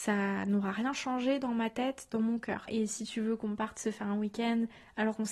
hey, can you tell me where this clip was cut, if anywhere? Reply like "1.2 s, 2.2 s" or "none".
2.7 s